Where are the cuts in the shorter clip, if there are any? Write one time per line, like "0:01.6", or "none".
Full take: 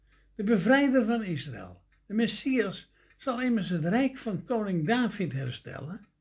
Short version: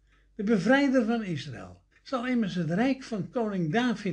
0:01.9